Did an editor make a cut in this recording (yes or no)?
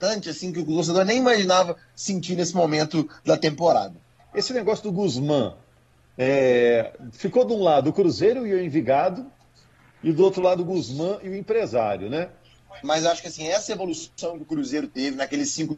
yes